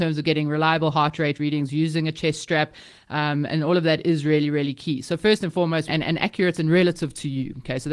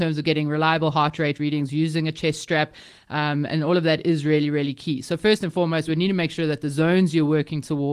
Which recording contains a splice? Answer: first; 1 cut; at 5.9 s

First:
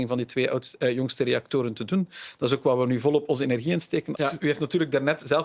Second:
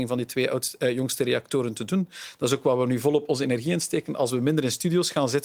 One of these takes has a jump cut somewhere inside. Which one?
first; 1 cut; at 4.1 s

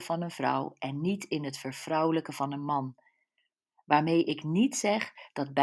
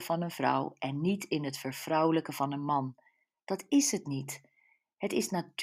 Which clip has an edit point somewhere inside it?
second; 1 cut; at 3.3 s

